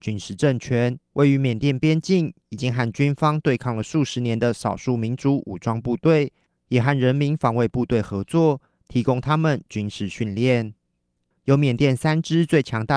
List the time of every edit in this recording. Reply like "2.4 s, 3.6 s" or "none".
1.0 s, 11.3 s